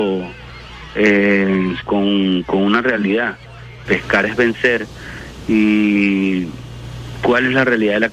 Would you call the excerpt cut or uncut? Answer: cut